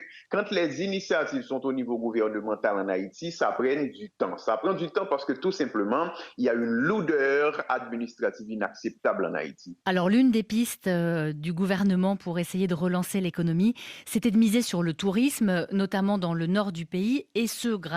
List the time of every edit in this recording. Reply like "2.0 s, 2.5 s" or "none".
none